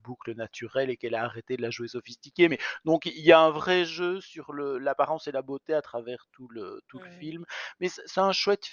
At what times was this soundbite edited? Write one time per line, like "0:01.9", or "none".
none